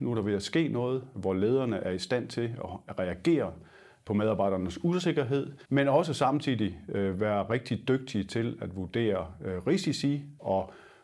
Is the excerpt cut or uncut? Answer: cut